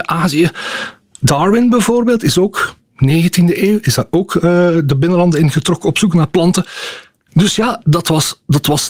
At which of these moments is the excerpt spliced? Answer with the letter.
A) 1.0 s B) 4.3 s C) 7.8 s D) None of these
C